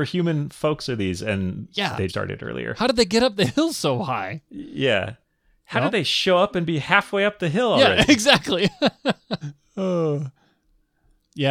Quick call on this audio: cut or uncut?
cut